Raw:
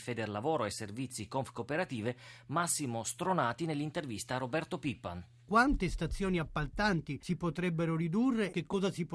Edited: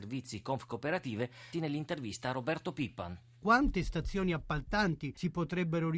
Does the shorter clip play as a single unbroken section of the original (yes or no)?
no